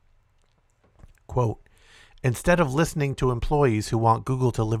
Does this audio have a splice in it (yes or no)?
no